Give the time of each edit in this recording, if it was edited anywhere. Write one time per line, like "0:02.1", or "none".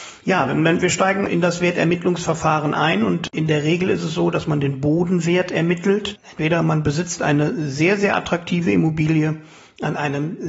0:01.3
0:06.2